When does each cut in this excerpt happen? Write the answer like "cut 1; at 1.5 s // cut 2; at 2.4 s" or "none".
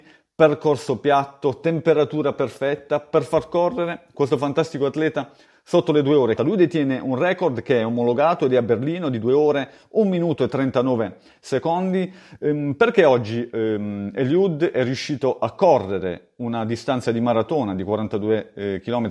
cut 1; at 6.4 s